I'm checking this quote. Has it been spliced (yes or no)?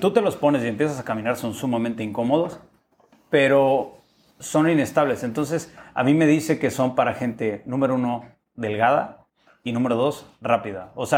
no